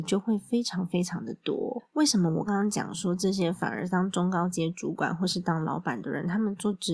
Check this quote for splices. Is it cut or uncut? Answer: cut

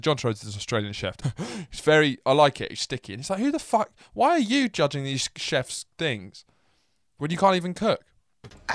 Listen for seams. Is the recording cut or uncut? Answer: cut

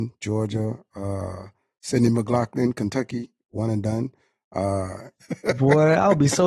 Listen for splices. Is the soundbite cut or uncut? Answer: cut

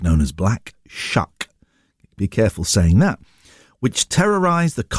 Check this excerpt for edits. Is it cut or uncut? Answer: uncut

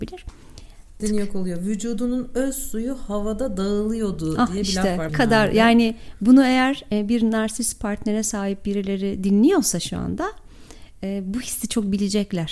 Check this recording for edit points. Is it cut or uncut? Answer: cut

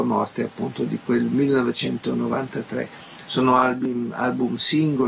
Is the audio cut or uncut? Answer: uncut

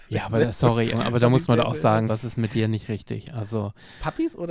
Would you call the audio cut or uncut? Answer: cut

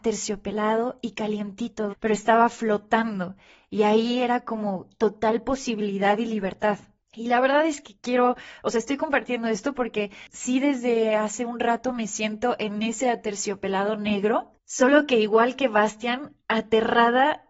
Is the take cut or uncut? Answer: cut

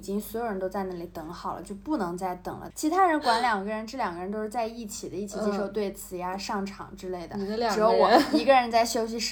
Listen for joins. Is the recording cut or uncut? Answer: cut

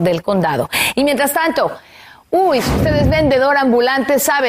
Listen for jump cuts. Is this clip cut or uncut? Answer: uncut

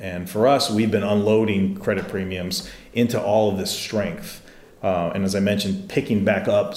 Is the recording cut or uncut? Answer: uncut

